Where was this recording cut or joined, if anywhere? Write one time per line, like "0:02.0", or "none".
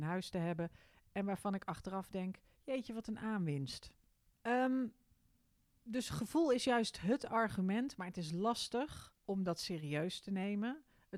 0:04.3
0:09.2

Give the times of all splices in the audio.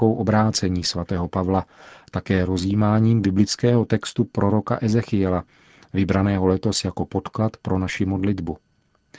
none

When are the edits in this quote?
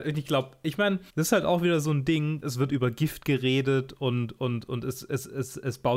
0:01.1
0:02.4

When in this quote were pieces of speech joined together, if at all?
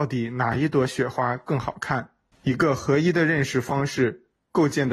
0:02.3

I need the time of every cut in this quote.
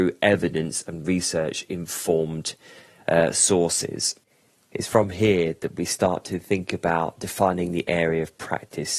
none

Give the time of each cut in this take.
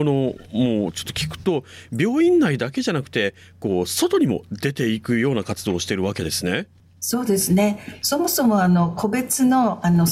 0:08.0

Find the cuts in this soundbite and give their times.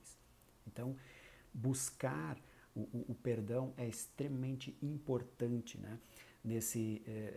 none

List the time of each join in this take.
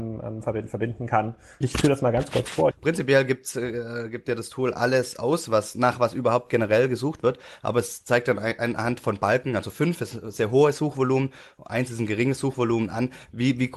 0:01.6
0:02.7

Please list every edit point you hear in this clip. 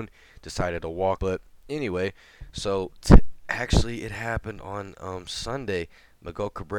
0:01.2

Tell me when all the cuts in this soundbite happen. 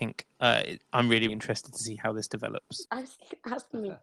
0:01.3
0:02.9

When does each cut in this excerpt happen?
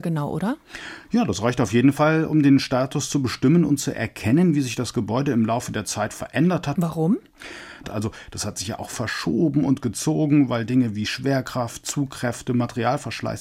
0:06.7
0:07.8

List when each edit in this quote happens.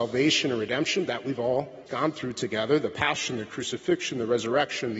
0:01.9

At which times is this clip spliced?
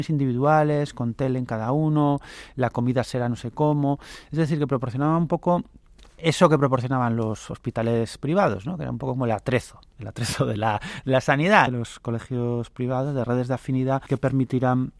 0:11.7

